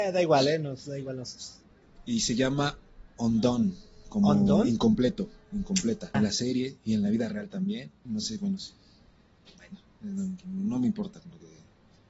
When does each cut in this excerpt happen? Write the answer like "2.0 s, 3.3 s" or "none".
6.1 s, 8.1 s

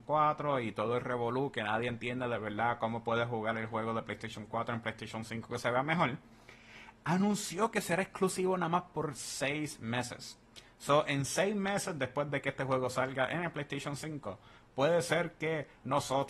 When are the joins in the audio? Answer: none

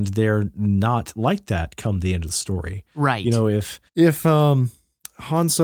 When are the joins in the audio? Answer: 3.9 s

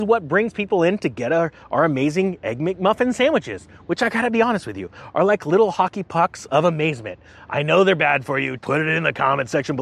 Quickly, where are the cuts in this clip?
8.6 s

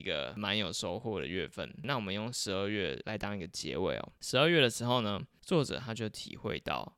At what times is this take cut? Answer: none

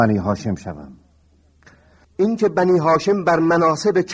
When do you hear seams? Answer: 2.0 s

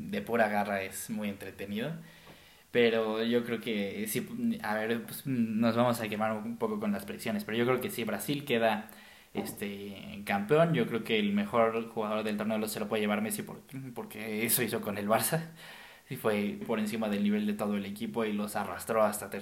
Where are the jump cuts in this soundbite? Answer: 16.6 s

